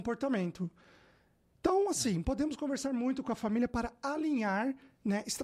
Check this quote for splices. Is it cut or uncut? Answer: uncut